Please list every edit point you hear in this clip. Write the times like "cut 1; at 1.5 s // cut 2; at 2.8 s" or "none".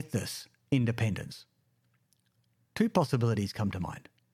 none